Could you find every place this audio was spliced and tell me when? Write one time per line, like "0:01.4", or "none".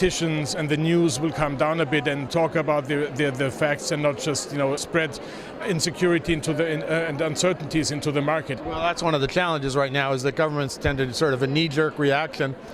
0:02.3
0:04.8
0:08.6